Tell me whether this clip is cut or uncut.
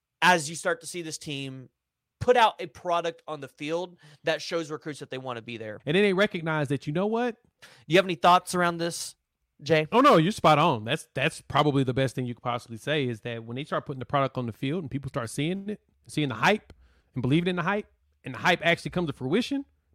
cut